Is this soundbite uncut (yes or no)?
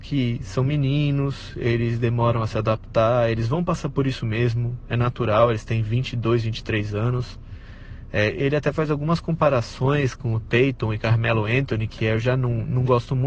yes